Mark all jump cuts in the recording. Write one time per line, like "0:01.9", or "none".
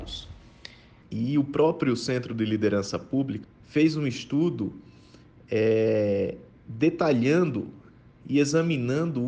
0:01.0
0:03.4